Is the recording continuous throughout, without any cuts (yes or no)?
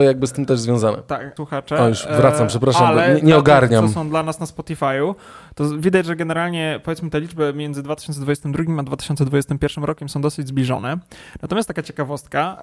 no